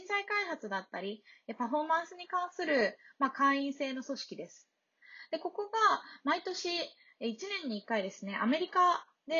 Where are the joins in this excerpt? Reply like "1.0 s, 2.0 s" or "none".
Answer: none